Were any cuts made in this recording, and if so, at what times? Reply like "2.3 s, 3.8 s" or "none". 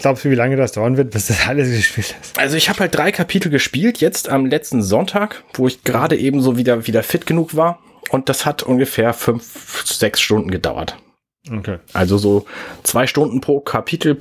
none